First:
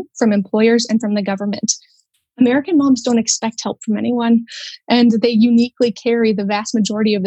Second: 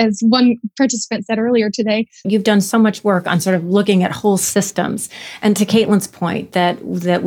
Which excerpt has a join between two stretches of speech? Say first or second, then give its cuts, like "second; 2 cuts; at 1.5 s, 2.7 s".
second; 1 cut; at 2.2 s